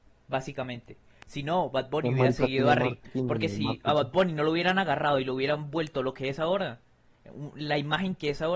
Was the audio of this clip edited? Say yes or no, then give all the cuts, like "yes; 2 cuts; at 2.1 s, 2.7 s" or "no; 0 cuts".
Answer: no; 0 cuts